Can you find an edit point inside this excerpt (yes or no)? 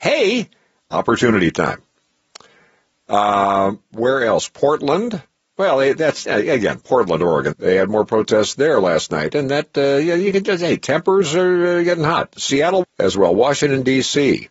yes